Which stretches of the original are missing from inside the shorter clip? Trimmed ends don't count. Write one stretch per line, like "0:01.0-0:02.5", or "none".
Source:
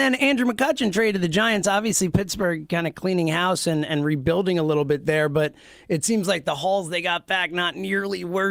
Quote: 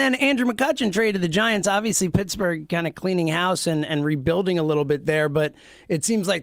none